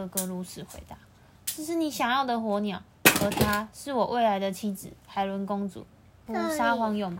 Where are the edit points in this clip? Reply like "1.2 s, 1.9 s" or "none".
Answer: 6.3 s